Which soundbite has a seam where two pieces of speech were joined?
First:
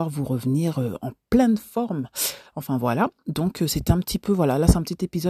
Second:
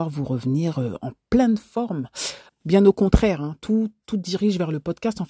second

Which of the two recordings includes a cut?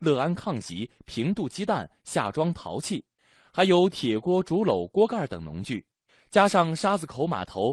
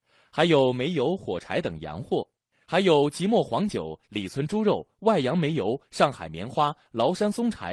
second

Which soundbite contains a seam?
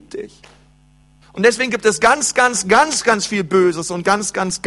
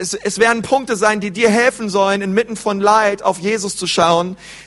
first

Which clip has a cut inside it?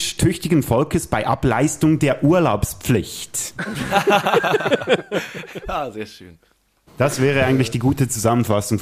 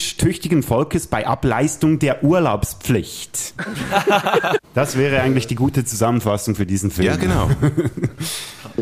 second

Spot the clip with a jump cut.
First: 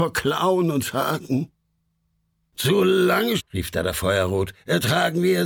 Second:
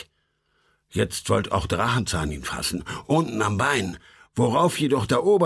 first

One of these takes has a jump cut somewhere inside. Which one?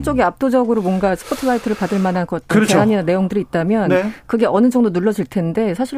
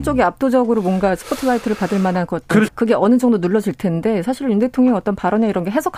second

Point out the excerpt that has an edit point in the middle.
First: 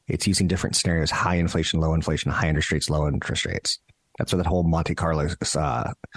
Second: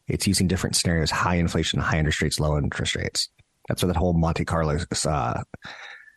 second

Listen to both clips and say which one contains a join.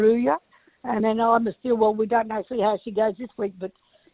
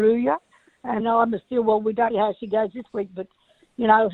second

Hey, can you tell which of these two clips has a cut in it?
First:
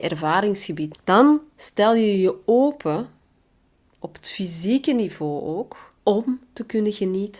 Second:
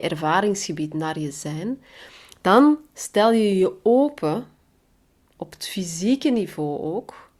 first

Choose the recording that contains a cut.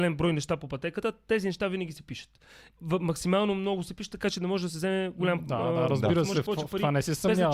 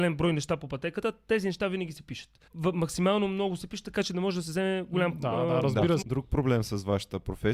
second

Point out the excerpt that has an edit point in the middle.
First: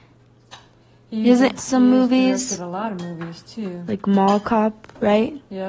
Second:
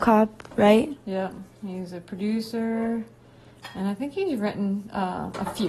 first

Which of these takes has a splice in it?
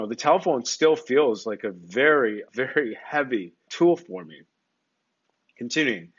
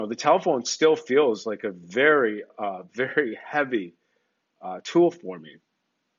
first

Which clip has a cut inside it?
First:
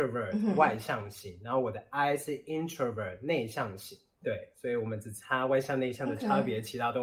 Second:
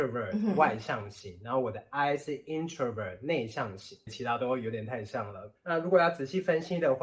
second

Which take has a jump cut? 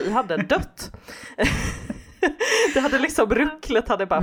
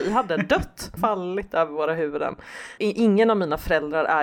second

